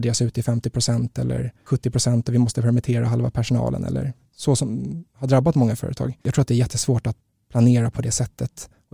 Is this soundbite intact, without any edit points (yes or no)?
no